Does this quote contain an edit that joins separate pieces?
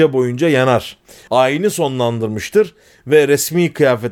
yes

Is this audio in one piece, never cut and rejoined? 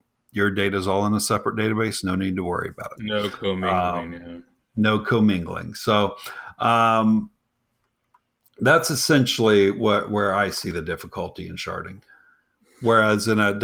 yes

